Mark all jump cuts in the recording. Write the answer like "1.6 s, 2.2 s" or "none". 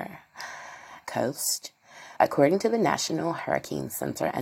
1.0 s, 2.2 s